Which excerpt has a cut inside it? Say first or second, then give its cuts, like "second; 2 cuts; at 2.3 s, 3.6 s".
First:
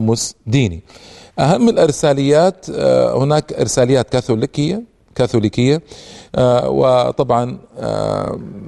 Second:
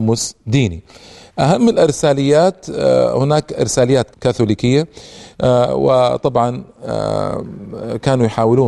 second; 1 cut; at 4.1 s